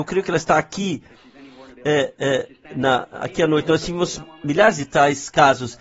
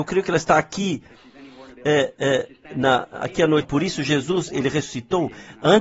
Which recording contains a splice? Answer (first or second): second